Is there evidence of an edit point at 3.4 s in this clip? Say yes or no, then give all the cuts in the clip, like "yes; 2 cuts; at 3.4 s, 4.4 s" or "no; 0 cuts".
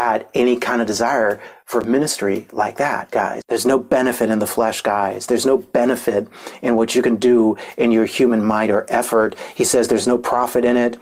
yes; 1 cut; at 3.4 s